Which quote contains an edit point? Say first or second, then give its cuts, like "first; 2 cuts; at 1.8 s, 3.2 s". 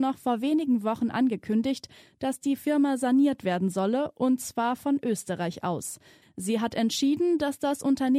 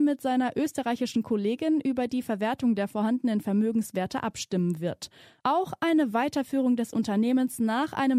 first; 1 cut; at 6.2 s